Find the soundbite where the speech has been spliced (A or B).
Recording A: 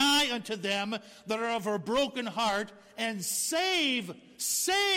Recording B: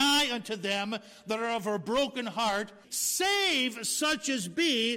B